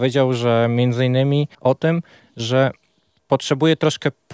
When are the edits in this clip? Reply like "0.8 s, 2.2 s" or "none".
1.5 s